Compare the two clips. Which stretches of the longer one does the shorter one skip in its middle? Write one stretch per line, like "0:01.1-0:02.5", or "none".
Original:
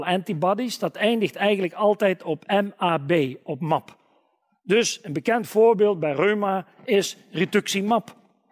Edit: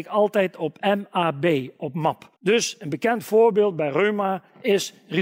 0:04.0-0:04.6